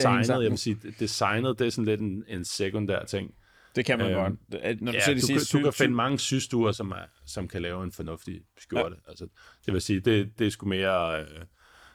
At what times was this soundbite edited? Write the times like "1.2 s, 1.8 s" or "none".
none

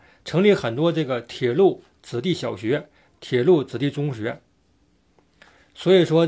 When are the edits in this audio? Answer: none

